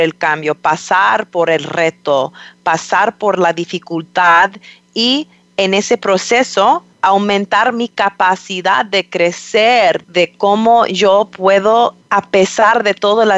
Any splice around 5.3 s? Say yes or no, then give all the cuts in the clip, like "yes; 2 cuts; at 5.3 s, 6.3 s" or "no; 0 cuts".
no; 3 cuts; at 6.9 s, 10.0 s, 12.0 s